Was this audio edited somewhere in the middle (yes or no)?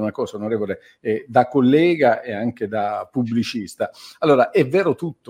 no